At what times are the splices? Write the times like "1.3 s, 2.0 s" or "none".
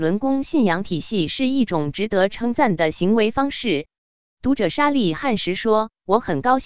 4.0 s